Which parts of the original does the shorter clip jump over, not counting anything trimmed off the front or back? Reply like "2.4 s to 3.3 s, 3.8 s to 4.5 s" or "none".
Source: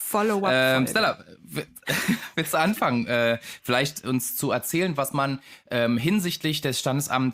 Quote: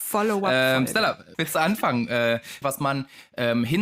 1.3 s to 2.3 s, 3.6 s to 5.0 s

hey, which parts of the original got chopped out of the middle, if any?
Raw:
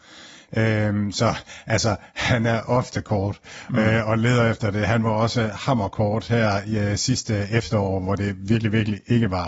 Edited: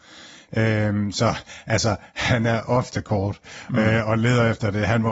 none

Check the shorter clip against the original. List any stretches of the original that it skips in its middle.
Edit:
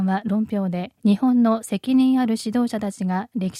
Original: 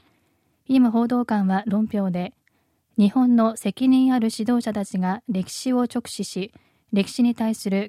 2.4 s to 2.9 s

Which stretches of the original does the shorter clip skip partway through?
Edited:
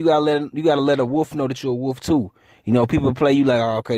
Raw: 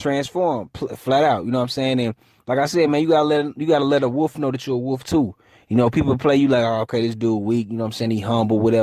none

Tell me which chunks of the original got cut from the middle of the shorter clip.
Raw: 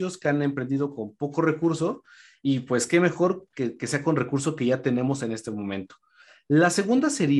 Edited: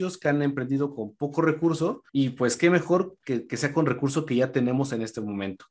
2.1 s to 2.4 s

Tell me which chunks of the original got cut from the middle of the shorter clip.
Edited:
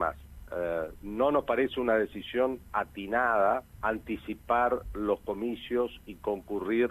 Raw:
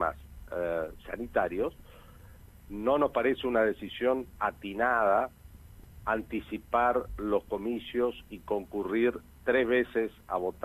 1.0 s to 2.7 s, 5.4 s to 6.0 s

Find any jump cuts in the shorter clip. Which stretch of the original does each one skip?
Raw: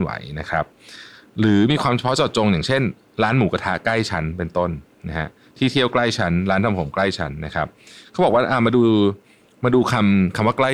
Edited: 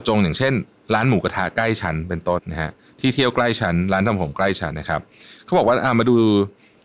4.7 s to 5.0 s, 7.3 s to 7.4 s

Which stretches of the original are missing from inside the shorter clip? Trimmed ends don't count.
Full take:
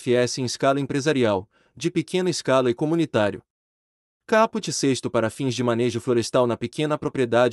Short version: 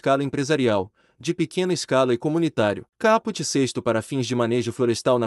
3.5 s to 4.2 s

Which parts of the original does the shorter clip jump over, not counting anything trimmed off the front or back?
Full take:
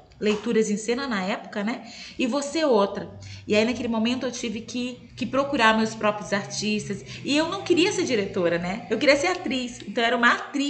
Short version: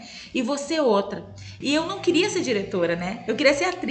3.4 s to 7.2 s

